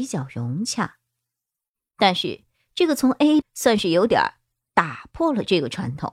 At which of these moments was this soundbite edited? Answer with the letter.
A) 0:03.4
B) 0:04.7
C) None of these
A